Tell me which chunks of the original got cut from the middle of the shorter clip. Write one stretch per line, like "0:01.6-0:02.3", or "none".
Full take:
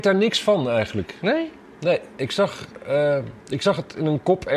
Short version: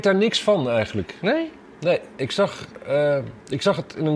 none